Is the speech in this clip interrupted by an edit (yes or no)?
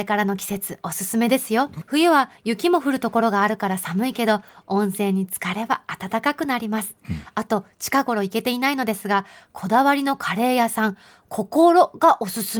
yes